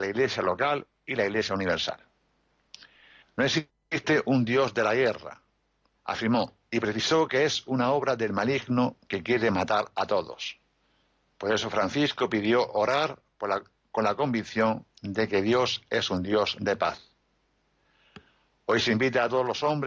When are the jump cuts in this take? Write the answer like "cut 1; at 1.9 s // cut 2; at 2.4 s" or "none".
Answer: cut 1; at 3.2 s